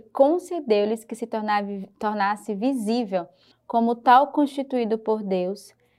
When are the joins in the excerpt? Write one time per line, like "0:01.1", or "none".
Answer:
0:03.5